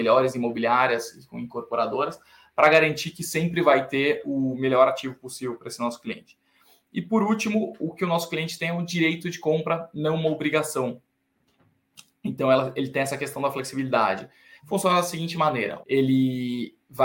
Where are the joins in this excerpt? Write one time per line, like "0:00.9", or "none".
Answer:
0:14.6
0:15.8